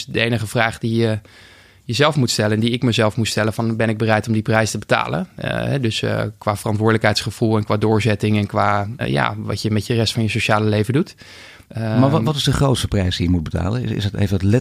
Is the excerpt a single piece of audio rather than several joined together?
no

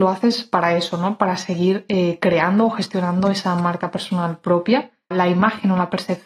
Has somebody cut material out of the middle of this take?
yes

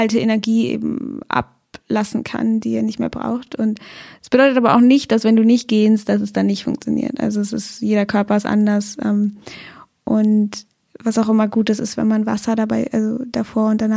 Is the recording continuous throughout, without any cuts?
yes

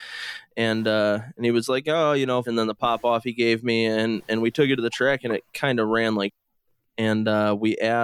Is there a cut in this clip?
yes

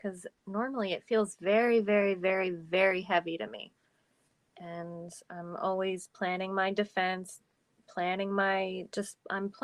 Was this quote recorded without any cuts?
yes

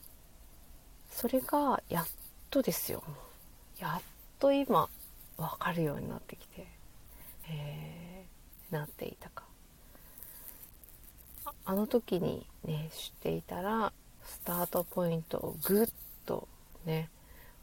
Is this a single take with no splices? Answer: no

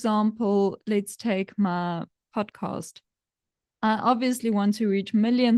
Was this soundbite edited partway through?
no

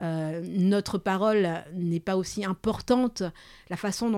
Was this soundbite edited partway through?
no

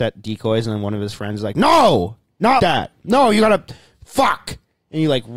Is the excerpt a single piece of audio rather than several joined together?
no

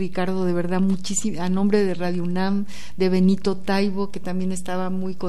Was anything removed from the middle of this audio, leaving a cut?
no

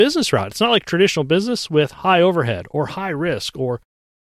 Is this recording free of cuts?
yes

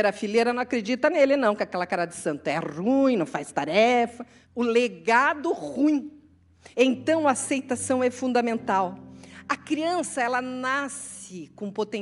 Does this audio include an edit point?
yes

